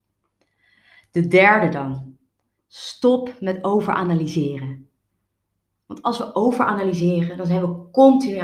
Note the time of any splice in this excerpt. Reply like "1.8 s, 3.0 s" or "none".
none